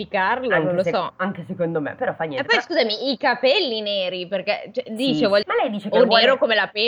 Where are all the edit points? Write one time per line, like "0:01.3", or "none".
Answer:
0:05.4